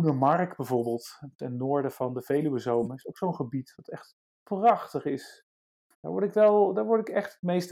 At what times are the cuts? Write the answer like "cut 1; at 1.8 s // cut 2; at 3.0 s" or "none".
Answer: cut 1; at 5.9 s

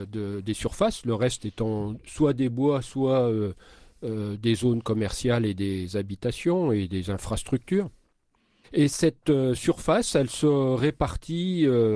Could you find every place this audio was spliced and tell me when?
none

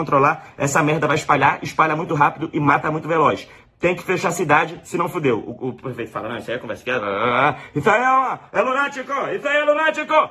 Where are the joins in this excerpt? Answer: none

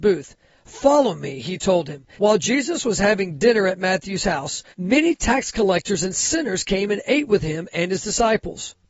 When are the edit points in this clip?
cut 1; at 2.1 s // cut 2; at 4.7 s

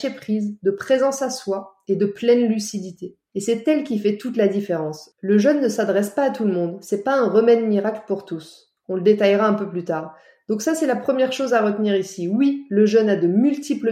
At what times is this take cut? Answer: cut 1; at 3.3 s

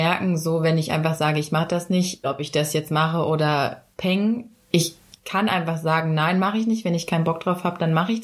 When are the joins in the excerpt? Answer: cut 1; at 2.2 s

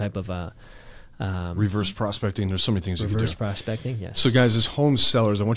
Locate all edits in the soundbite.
none

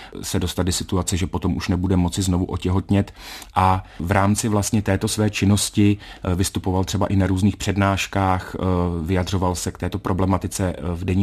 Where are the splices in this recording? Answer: none

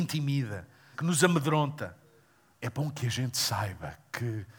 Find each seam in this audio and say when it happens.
cut 1; at 0.9 s // cut 2; at 2.5 s

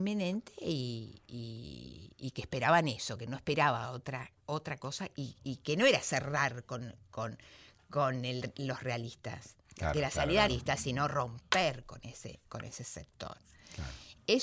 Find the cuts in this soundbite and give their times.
cut 1; at 10.5 s

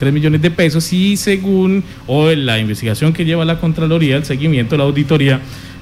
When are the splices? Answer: none

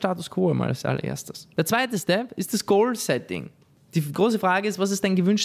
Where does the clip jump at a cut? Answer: cut 1; at 1.5 s

